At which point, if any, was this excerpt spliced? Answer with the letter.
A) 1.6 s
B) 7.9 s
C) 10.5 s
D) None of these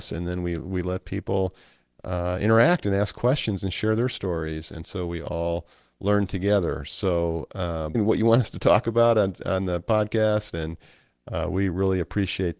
B